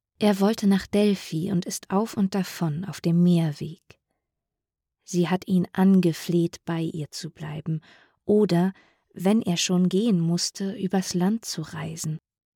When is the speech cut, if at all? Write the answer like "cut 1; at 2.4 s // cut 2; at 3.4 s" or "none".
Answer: none

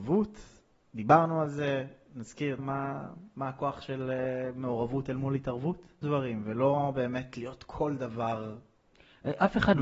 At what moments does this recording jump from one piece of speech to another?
cut 1; at 2.6 s // cut 2; at 6.0 s

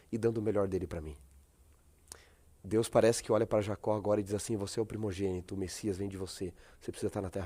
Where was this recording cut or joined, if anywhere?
none

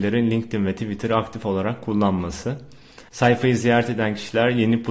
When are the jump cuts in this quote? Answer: cut 1; at 3.1 s

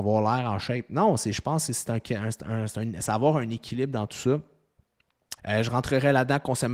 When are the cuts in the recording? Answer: cut 1; at 5.4 s

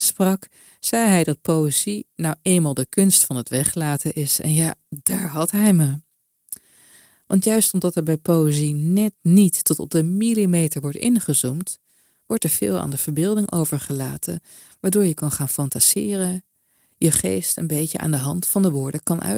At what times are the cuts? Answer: none

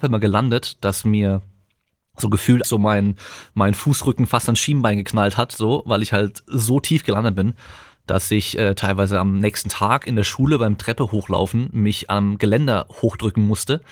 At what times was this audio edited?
cut 1; at 2.6 s

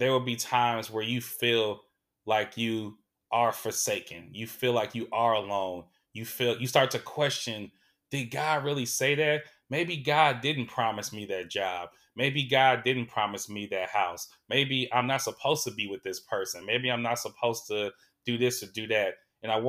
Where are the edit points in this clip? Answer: none

